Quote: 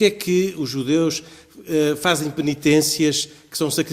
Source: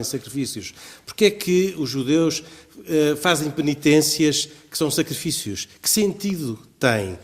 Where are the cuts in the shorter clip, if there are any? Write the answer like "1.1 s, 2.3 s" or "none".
none